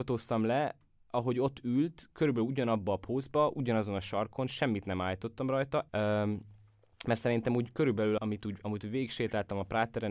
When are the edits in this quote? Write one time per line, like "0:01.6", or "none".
0:05.9
0:08.2